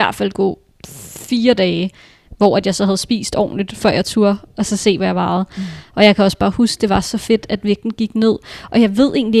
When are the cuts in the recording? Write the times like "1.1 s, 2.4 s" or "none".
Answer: none